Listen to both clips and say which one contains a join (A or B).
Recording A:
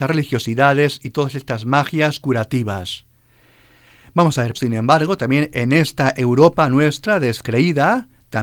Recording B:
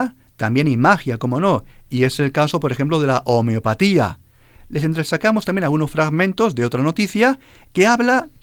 A